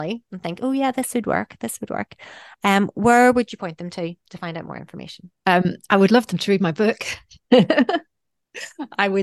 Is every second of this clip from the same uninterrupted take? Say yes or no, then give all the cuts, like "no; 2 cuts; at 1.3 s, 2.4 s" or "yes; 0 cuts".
yes; 0 cuts